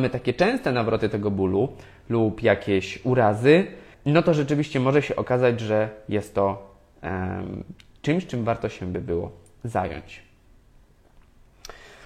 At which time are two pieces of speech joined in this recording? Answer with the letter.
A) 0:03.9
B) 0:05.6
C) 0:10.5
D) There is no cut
A